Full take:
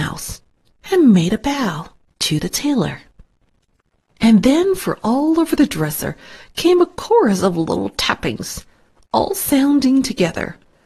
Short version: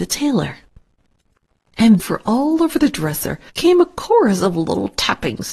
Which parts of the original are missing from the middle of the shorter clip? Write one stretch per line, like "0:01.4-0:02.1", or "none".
0:04.4-0:04.8
0:06.3-0:06.5

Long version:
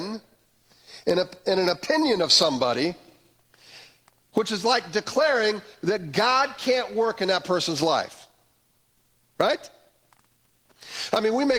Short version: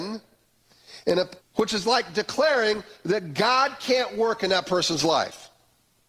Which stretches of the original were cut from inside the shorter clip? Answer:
0:01.4-0:04.2

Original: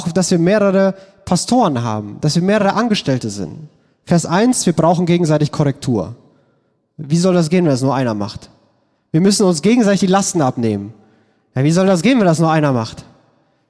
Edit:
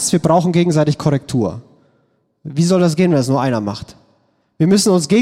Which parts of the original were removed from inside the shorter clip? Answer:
none

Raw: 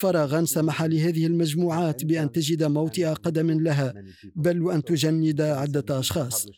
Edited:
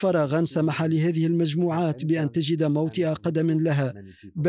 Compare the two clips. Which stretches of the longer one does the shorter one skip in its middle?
none

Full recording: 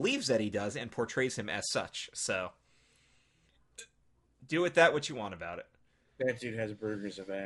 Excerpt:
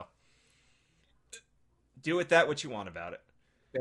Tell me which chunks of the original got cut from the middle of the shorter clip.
none

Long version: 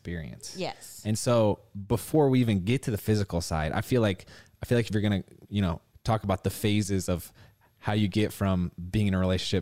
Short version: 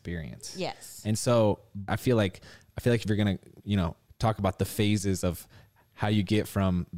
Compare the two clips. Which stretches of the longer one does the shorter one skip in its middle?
0:01.9-0:03.7

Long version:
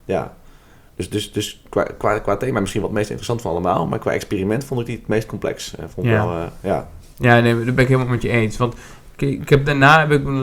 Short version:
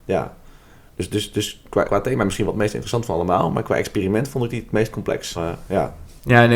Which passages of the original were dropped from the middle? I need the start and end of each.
0:01.9-0:02.2
0:05.7-0:06.3

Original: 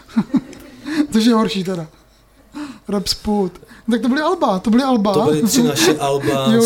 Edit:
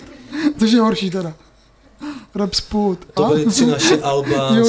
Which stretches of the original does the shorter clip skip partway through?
0:03.7-0:05.1

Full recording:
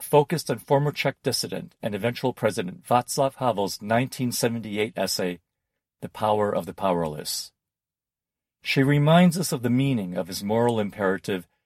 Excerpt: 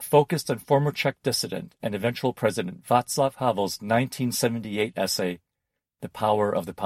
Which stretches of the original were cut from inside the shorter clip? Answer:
none

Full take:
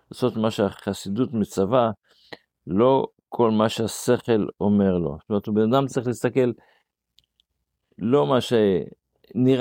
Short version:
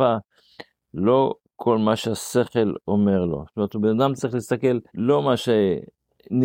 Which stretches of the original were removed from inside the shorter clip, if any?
0:06.6-0:07.9

